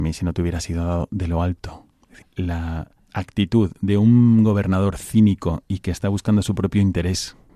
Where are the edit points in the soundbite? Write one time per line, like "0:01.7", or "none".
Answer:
0:02.2

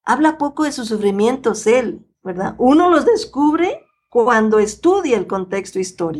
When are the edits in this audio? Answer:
none

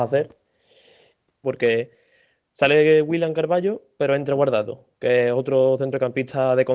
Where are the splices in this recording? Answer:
0:01.4

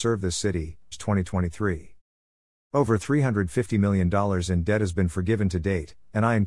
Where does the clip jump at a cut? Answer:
0:00.9
0:02.5

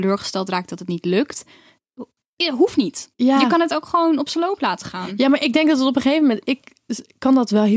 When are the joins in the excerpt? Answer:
none

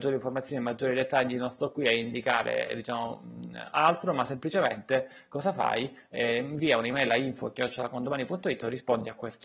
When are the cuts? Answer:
none

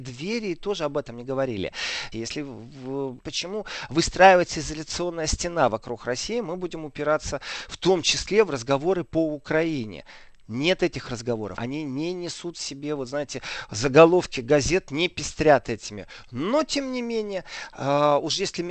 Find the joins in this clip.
0:02.1
0:03.2
0:11.6

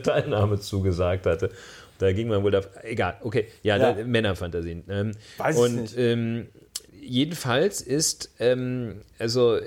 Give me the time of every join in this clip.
0:06.9

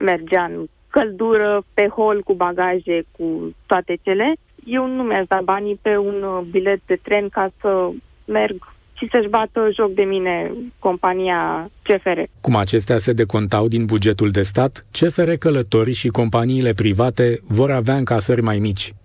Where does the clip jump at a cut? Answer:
0:01.7
0:12.4

